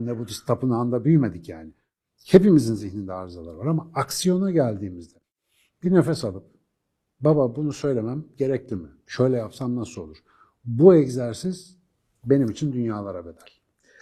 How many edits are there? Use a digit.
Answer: 1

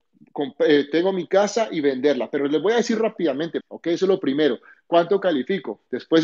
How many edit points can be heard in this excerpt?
1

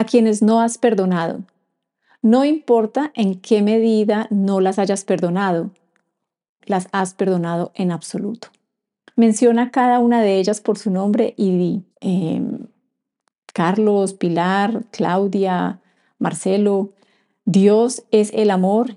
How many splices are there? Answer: 3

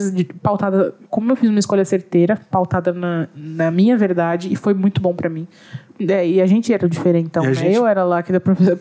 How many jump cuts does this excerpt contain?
1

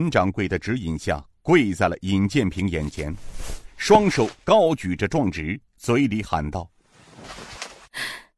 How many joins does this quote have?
0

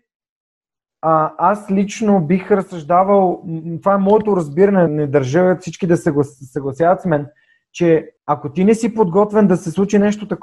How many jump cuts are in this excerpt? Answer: 2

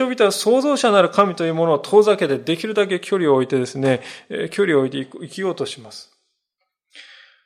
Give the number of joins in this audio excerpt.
0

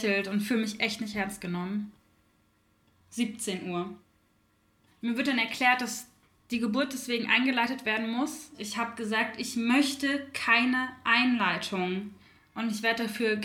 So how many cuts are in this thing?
1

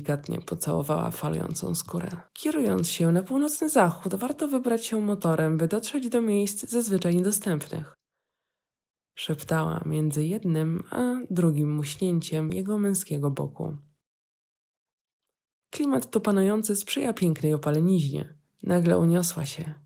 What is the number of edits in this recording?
3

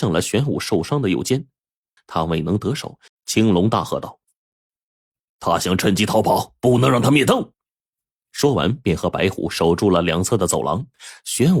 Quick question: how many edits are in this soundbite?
2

